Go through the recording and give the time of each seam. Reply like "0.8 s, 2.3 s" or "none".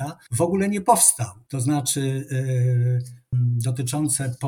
3.3 s